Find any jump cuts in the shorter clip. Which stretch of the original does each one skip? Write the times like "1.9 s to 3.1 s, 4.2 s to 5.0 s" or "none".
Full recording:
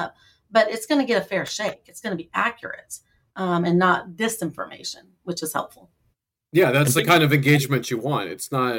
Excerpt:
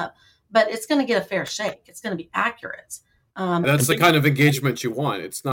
3.6 s to 6.7 s

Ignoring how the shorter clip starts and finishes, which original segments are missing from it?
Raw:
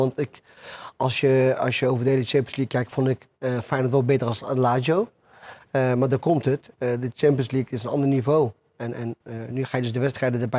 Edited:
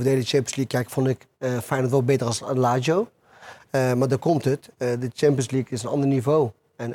none

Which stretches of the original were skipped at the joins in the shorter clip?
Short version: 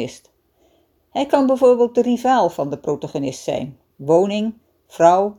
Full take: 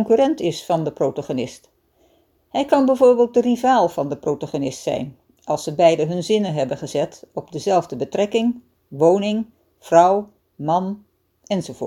5.3 s to 8.8 s

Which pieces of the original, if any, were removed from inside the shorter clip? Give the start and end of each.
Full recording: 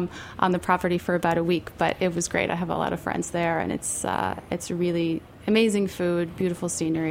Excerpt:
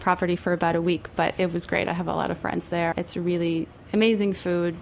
3.5 s to 4.5 s

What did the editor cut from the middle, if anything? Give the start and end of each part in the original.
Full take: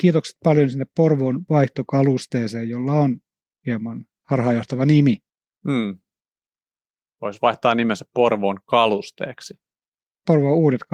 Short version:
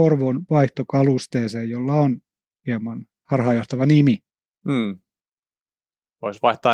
none

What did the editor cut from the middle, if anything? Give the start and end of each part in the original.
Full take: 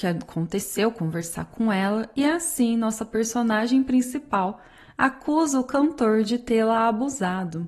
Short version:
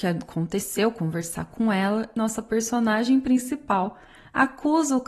2.2 s to 2.8 s

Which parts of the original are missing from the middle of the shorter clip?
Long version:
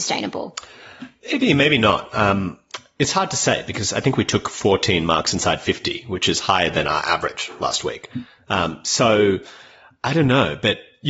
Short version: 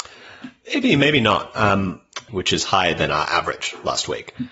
2.9 s to 6.0 s

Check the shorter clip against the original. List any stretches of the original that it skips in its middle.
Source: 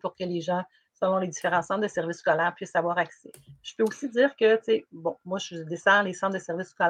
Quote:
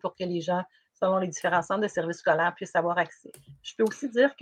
none

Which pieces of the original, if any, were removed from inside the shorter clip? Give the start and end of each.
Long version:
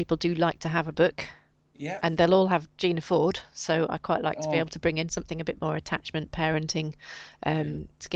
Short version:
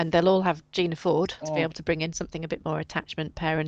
3.5 s to 4.4 s

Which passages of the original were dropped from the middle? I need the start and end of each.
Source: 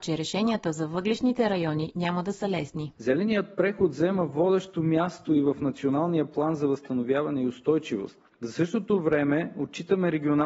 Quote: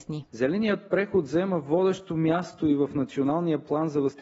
none

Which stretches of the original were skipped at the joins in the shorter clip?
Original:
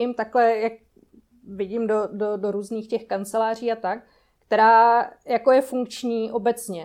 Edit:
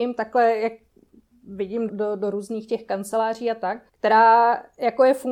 1.9 s to 2.1 s, 4.1 s to 4.4 s

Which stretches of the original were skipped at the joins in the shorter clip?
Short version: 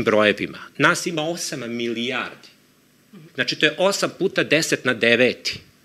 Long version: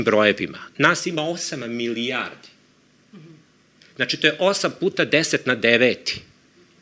3.3 s to 3.9 s

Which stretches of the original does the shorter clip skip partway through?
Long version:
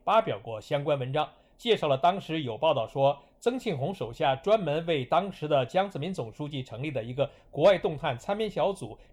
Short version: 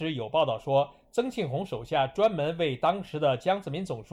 none

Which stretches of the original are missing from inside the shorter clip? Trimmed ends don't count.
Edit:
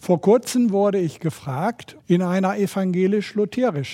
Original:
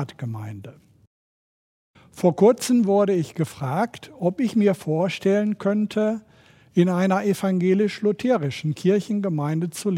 4.1 s to 6.7 s

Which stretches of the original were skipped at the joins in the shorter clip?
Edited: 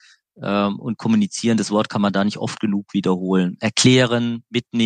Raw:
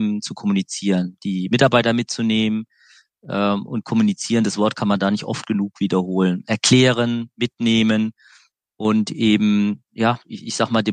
none

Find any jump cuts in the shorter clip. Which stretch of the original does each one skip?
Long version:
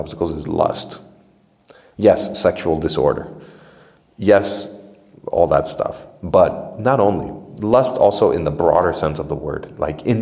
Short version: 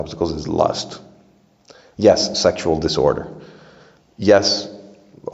none

